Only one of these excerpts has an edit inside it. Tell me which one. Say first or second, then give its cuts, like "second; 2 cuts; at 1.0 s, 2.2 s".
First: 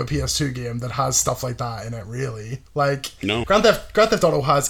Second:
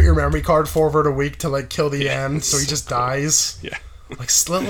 first; 1 cut; at 3.4 s